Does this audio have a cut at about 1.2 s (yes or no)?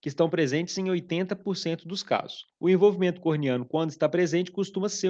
no